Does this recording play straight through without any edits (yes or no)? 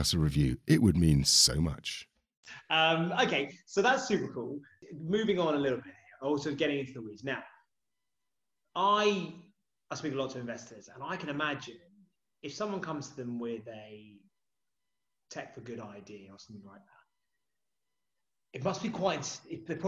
yes